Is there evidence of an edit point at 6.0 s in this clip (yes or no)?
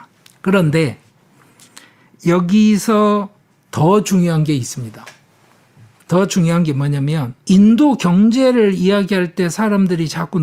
no